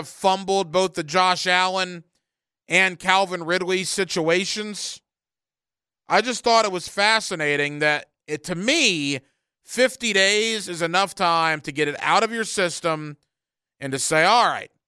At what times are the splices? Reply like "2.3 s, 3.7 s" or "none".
none